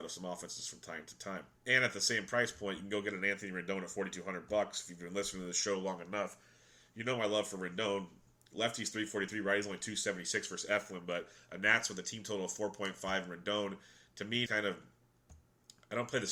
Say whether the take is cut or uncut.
cut